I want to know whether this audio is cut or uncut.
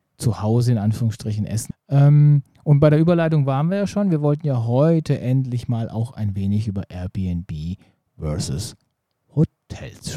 cut